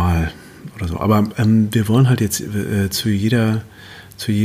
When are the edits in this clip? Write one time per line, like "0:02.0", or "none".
none